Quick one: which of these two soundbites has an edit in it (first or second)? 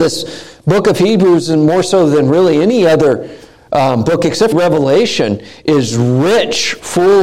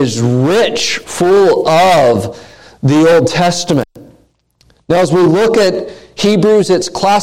first